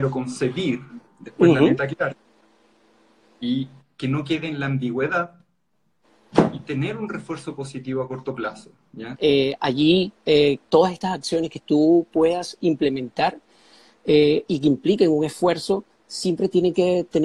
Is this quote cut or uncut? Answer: cut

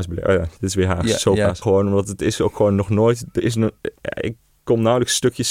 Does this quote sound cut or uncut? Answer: cut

